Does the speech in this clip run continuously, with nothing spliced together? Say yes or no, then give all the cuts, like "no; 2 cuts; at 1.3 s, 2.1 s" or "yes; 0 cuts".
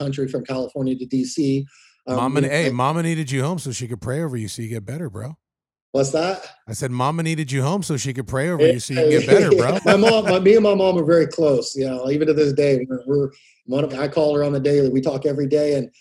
no; 2 cuts; at 9.8 s, 13.9 s